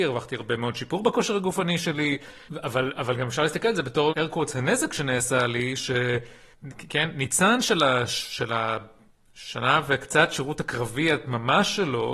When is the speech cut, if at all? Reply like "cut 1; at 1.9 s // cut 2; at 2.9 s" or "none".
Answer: cut 1; at 4.1 s